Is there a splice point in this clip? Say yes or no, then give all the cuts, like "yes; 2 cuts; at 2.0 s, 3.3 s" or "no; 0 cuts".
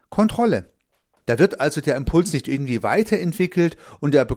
yes; 1 cut; at 1.2 s